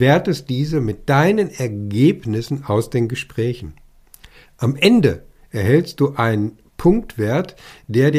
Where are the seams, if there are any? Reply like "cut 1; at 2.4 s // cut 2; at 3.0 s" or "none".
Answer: none